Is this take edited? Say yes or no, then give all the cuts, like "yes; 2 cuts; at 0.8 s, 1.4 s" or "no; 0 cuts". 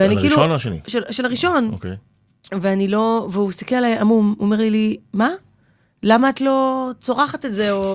no; 0 cuts